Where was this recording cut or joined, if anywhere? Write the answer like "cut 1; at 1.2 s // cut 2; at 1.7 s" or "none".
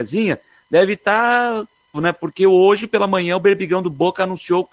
cut 1; at 1.9 s